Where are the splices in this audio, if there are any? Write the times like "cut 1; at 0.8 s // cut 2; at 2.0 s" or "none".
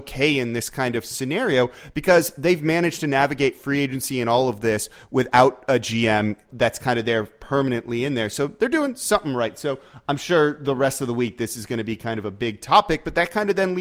cut 1; at 6.5 s